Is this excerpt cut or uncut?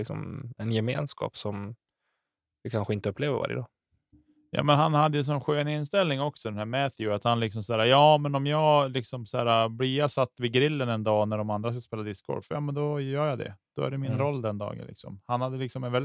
uncut